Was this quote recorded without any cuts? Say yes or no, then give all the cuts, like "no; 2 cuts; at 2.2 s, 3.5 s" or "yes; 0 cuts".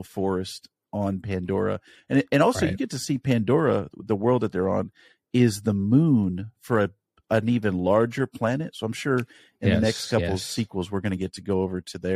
yes; 0 cuts